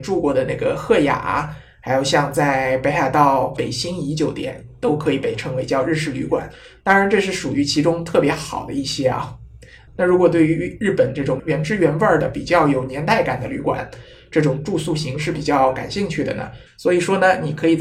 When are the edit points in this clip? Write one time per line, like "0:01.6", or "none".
0:09.9
0:16.7